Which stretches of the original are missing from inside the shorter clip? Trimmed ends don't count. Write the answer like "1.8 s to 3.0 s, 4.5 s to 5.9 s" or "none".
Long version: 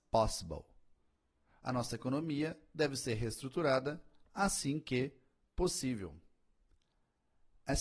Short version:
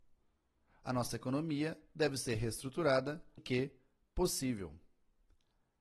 4.2 s to 4.8 s